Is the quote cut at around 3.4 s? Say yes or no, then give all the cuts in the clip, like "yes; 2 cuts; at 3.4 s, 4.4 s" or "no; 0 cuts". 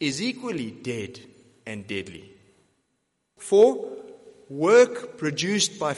yes; 1 cut; at 3.4 s